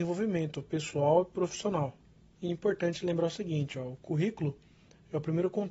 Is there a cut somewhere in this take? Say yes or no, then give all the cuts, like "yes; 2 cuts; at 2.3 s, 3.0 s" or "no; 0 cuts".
yes; 1 cut; at 2.3 s